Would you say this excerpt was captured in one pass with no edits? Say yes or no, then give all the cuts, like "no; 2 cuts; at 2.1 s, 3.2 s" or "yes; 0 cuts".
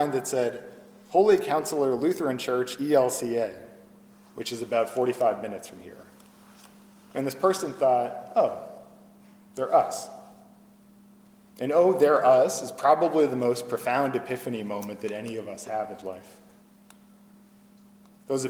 yes; 0 cuts